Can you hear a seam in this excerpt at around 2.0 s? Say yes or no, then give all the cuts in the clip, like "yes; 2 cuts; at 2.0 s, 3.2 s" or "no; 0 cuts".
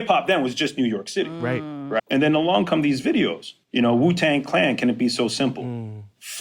yes; 1 cut; at 2.0 s